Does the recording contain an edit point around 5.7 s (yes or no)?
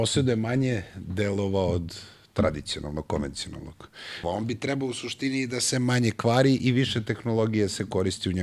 no